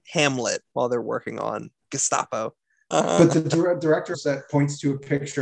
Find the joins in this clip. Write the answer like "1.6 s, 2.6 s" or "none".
2.9 s, 4.1 s

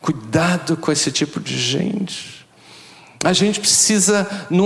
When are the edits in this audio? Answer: none

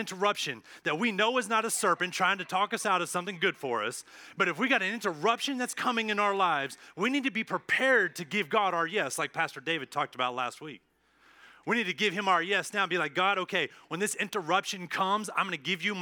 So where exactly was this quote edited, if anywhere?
none

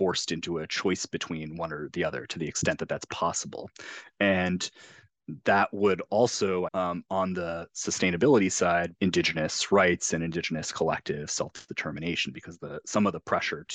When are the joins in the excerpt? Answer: 6.7 s, 9.0 s

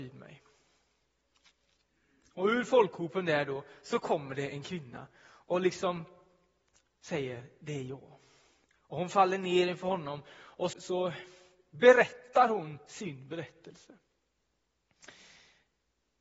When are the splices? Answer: 10.7 s

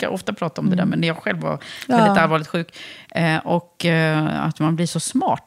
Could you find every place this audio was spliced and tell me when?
none

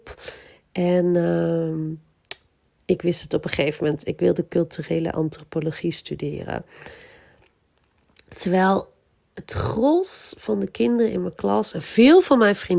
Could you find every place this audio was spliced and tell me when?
none

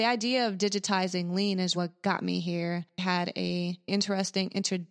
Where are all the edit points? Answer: 1.7 s

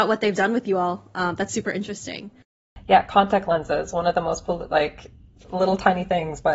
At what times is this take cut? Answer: none

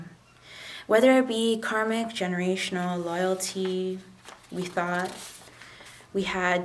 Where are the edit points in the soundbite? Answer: none

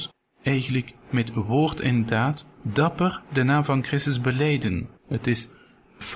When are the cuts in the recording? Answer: 5.0 s

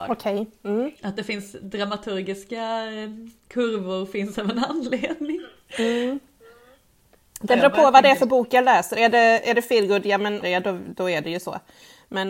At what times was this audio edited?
10.4 s

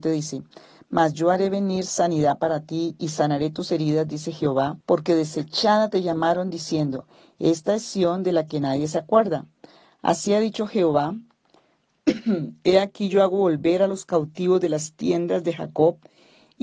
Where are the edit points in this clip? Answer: 4.8 s

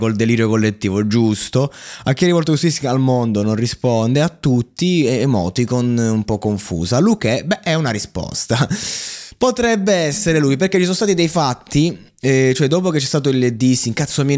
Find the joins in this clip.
none

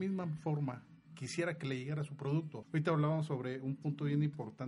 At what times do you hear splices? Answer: 2.6 s

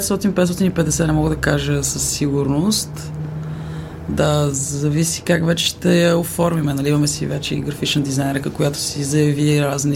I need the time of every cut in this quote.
none

